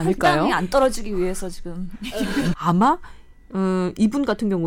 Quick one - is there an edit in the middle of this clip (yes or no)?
yes